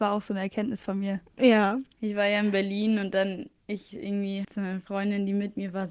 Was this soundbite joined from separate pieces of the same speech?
yes; 2 cuts; at 1.9 s, 4.4 s

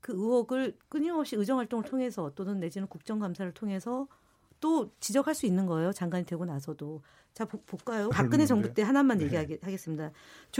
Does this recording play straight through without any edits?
no; 1 cut; at 8.1 s

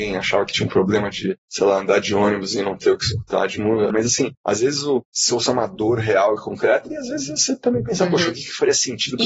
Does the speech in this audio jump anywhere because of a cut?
yes; 1 cut; at 3.9 s

